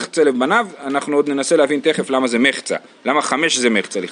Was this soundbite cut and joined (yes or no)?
no